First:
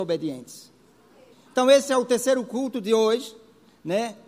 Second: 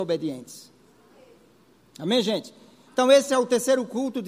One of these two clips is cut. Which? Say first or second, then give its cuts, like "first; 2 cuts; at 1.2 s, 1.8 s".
first; 1 cut; at 1.3 s